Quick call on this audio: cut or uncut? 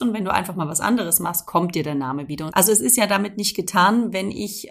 cut